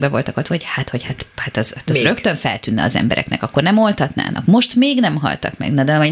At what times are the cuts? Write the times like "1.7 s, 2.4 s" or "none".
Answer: none